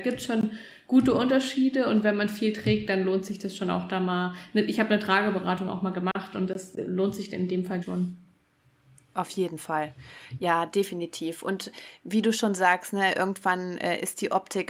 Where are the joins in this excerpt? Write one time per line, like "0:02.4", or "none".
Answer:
0:07.8